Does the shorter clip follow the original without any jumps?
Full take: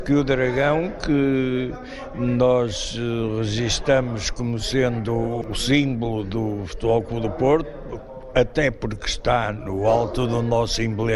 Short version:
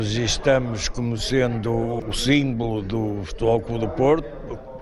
yes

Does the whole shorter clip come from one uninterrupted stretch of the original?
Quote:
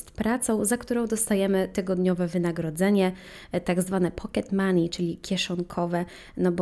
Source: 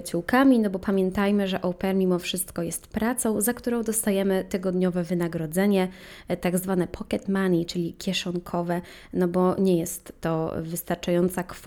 yes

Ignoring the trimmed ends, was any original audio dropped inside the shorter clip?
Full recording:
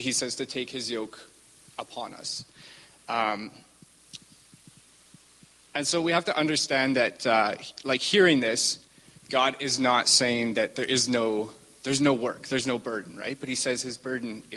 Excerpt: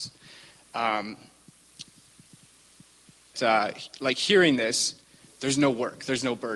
yes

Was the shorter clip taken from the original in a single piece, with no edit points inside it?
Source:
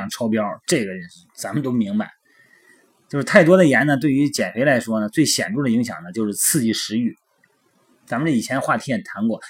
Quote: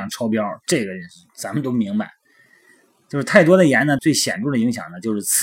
no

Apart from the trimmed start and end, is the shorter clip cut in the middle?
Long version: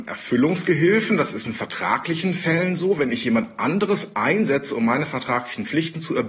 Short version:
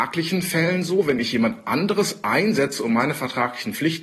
no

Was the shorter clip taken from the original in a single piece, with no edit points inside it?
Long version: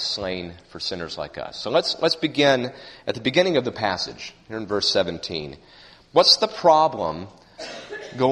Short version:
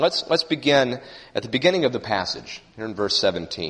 yes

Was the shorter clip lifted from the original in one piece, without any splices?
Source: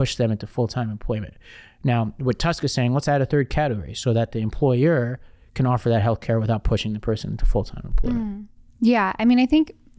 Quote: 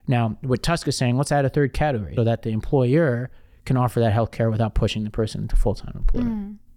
no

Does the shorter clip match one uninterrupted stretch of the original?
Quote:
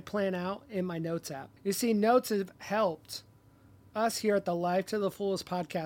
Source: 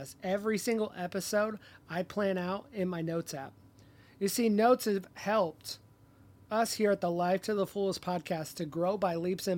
no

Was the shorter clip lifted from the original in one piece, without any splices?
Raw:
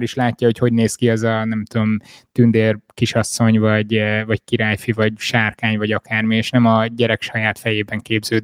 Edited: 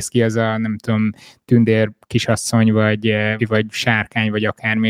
no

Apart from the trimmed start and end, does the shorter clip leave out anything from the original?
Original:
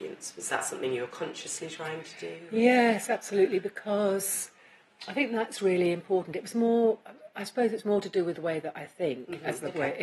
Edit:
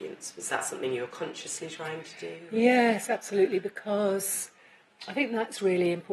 no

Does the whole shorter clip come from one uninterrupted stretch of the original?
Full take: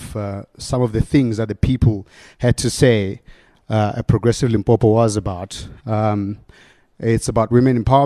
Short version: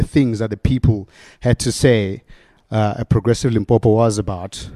yes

